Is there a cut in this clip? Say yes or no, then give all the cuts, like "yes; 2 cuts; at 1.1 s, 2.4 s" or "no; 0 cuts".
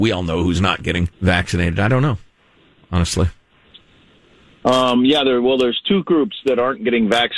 yes; 1 cut; at 1.1 s